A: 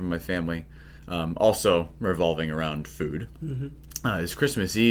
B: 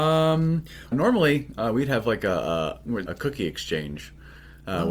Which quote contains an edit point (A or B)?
B